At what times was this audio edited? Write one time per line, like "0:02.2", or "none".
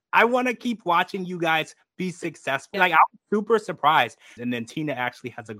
0:02.7
0:04.4